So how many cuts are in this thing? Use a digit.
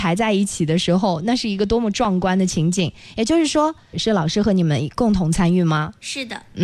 1